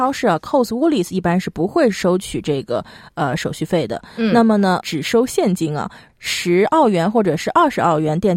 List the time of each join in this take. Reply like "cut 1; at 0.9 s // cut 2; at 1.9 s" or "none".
cut 1; at 4.8 s // cut 2; at 6.1 s